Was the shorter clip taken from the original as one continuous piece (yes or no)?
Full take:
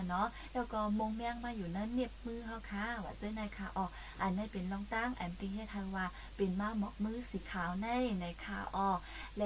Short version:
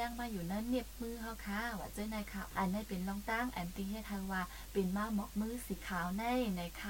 no